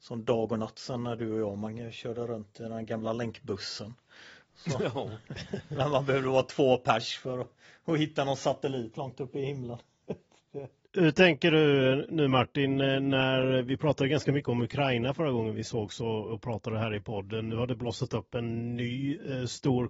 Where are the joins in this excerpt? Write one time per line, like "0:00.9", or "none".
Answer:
none